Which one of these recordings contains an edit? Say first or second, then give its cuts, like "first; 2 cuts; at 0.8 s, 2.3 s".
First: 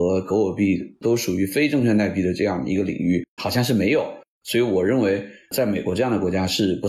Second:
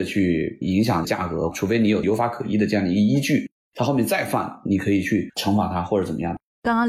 first; 1 cut; at 3.4 s